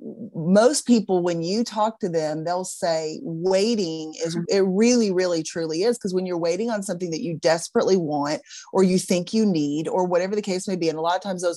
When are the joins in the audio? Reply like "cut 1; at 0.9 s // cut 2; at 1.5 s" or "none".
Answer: cut 1; at 4.4 s